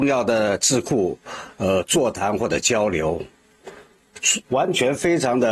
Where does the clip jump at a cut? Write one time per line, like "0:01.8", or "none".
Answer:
0:04.4